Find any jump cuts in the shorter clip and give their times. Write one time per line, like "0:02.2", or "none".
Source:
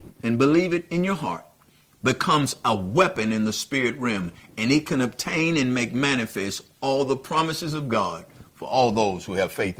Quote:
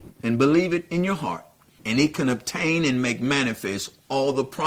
0:01.8